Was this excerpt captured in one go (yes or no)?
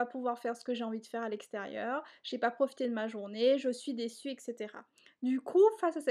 yes